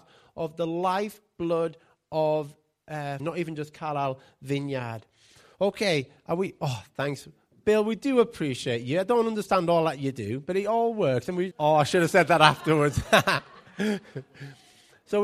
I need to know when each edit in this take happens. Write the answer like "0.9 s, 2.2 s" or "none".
3.2 s, 11.5 s